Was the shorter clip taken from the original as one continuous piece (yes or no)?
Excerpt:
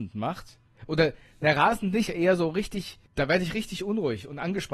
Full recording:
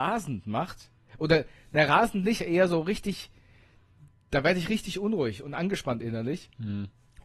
no